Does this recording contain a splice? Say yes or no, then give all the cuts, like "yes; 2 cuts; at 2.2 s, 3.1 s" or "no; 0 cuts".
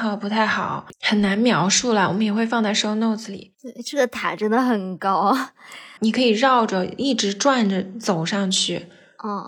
yes; 2 cuts; at 0.9 s, 6.0 s